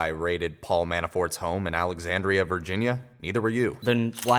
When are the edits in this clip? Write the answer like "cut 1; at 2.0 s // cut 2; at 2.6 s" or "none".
none